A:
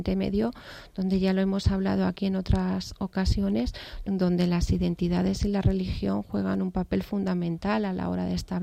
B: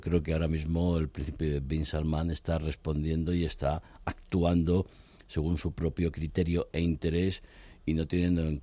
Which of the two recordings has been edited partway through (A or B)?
A